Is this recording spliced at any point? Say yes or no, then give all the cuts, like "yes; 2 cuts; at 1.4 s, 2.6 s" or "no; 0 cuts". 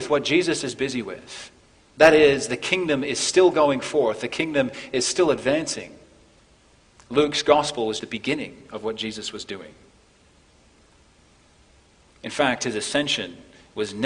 yes; 1 cut; at 8.0 s